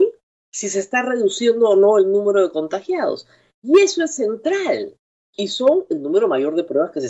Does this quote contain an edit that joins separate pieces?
yes; 1 cut; at 5.2 s

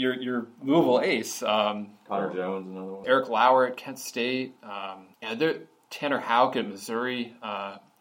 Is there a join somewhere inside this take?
yes; 2 cuts; at 3.0 s, 5.1 s

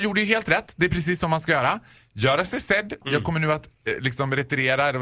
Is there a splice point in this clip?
yes; 1 cut; at 3.0 s

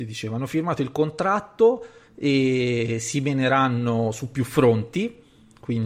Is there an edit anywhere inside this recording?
no; 0 cuts

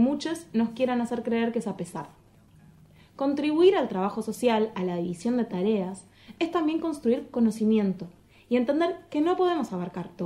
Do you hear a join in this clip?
no; 0 cuts

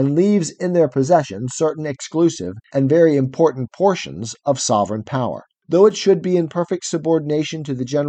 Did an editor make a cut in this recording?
yes; 1 cut; at 5.6 s

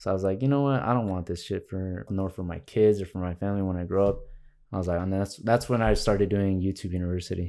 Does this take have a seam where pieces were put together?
yes; 2 cuts; at 2.1 s, 5.0 s

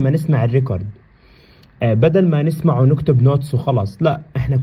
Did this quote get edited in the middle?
no; 0 cuts

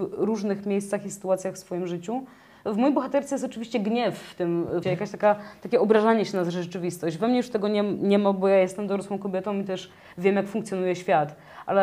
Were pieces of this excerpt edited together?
yes; 1 cut; at 4.8 s

